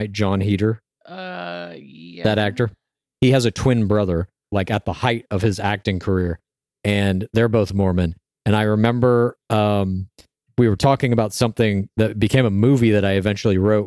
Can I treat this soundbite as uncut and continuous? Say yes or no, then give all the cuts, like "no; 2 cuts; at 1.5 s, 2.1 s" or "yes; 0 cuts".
no; 1 cut; at 4.4 s